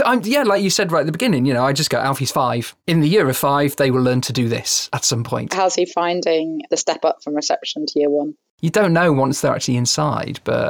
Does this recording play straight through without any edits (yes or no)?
yes